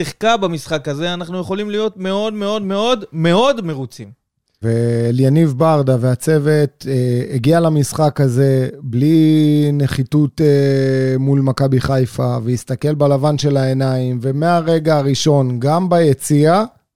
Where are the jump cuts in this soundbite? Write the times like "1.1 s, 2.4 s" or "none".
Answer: 4.6 s